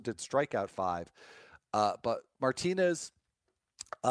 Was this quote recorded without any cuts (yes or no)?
yes